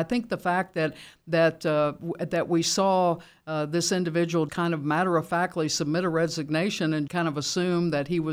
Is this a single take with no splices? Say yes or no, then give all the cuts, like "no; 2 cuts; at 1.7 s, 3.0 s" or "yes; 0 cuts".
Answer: no; 2 cuts; at 4.5 s, 7.1 s